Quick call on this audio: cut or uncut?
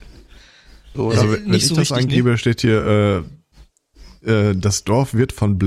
cut